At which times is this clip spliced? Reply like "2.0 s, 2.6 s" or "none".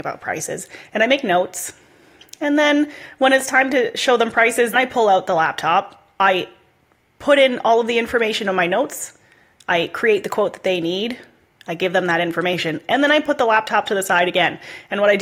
4.7 s